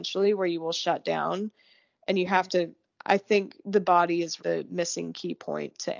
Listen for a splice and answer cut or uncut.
cut